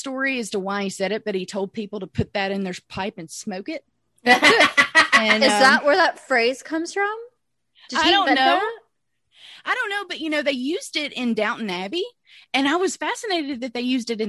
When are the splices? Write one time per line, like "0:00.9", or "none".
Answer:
none